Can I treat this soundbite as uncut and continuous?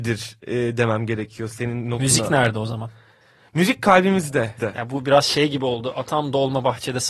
no; 1 cut; at 4.6 s

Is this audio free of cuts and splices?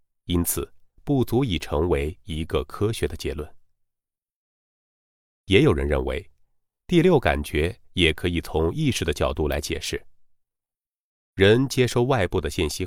yes; 0 cuts

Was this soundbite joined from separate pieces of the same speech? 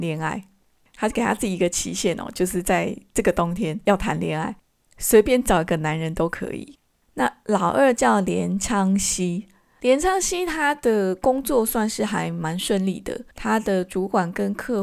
yes; 2 cuts; at 7.0 s, 13.3 s

